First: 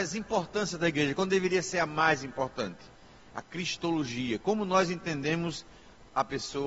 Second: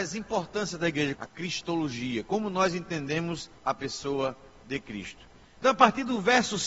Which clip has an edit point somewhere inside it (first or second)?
second